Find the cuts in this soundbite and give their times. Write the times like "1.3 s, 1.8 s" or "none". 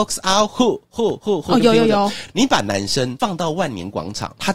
none